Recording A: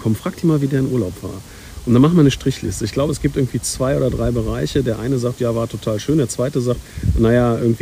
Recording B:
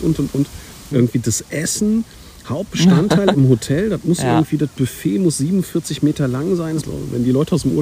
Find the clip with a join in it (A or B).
B